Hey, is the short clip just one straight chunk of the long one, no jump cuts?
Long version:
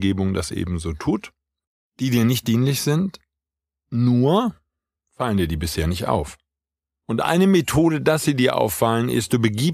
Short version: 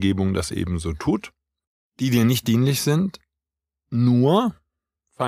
yes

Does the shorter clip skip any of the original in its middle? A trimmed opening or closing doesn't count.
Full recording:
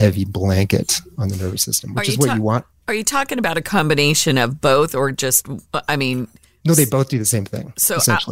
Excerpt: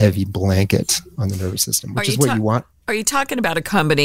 no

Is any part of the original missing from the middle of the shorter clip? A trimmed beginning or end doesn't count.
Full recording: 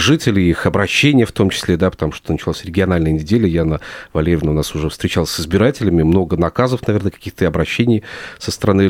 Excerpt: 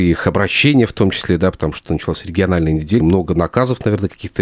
yes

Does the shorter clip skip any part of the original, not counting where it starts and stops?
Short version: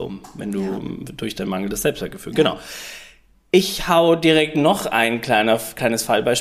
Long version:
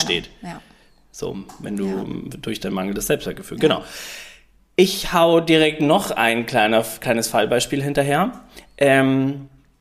no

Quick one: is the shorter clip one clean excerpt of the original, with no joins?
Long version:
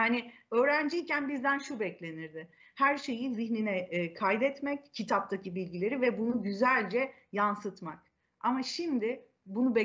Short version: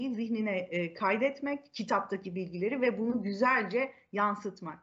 yes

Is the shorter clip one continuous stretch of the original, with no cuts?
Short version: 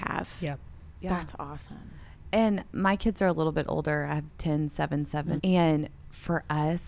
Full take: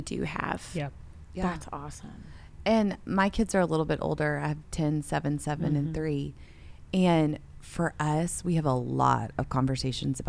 no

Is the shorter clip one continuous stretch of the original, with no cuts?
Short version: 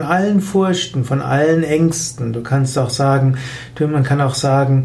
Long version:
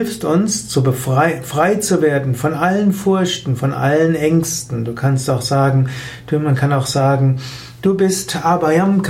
yes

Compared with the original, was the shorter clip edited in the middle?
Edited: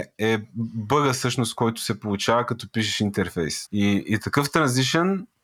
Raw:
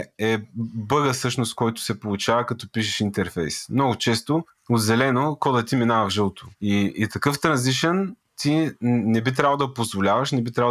yes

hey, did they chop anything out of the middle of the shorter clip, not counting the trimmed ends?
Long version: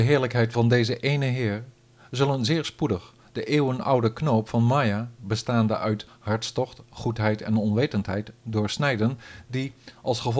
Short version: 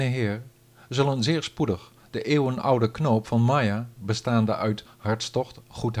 no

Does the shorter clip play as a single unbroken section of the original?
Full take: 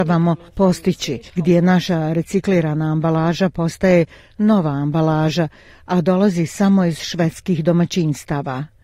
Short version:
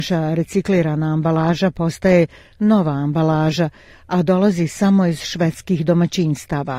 yes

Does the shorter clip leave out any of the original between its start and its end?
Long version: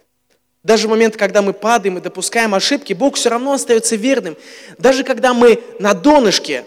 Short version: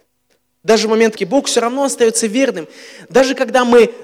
yes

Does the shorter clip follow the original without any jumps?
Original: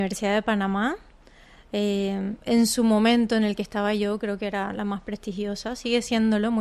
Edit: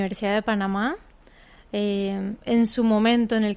yes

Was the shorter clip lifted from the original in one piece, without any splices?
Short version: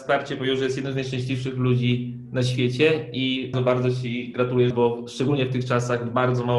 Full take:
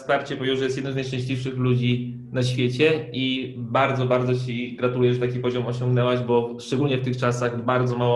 no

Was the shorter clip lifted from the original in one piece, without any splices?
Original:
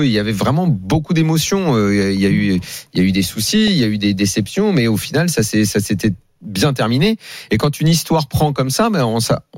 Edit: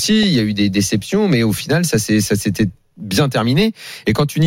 yes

